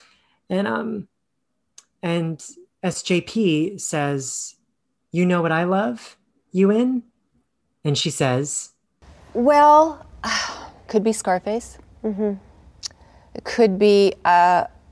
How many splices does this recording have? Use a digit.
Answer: 1